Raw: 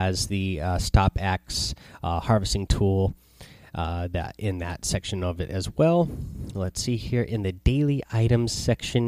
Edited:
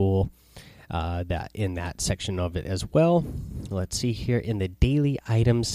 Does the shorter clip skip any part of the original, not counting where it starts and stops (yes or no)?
no